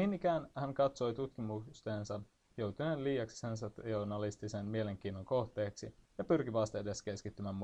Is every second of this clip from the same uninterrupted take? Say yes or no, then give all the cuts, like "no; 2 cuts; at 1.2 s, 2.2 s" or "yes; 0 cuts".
no; 1 cut; at 6.0 s